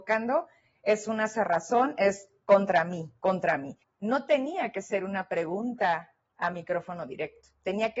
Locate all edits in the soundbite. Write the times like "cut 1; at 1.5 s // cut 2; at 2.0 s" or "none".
cut 1; at 3.8 s